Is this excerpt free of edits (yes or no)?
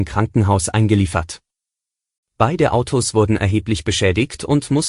yes